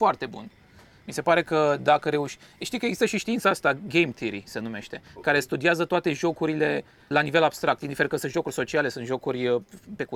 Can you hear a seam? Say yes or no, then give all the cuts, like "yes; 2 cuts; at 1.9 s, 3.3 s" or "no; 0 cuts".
yes; 1 cut; at 7.1 s